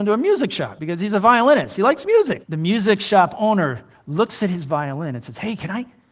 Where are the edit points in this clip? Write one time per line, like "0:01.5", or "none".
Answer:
0:02.4